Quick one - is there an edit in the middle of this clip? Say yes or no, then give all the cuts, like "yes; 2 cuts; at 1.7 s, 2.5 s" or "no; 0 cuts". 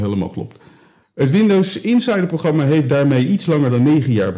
yes; 1 cut; at 1.0 s